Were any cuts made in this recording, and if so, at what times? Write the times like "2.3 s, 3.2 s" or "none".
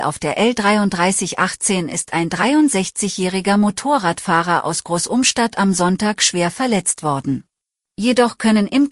7.8 s